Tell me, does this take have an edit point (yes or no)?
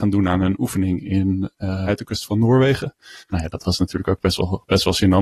yes